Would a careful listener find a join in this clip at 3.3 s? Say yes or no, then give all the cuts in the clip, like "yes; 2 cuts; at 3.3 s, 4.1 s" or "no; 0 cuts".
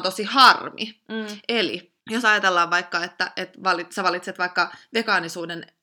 no; 1 cut; at 2.0 s